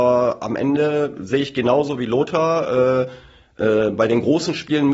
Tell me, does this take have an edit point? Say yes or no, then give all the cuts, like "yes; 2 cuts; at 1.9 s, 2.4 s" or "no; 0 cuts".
no; 0 cuts